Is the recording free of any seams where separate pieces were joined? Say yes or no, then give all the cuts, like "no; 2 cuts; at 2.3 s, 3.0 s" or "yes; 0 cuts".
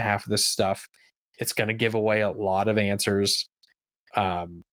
yes; 0 cuts